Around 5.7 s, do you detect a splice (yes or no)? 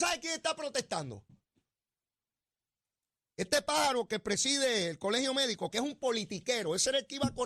yes